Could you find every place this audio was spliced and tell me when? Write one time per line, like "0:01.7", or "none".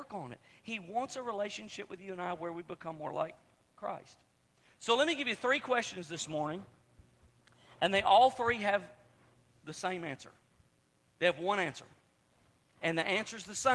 none